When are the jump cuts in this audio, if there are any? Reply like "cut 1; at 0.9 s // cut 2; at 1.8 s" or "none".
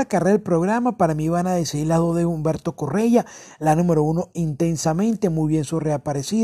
none